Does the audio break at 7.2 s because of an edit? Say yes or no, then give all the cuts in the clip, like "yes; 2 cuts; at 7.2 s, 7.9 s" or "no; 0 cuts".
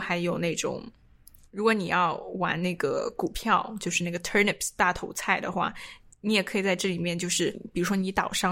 no; 0 cuts